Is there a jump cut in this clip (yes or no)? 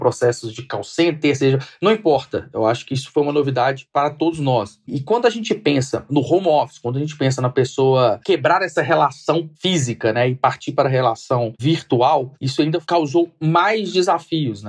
no